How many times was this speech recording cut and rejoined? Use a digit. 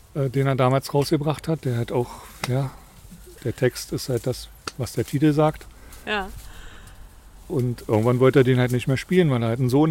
1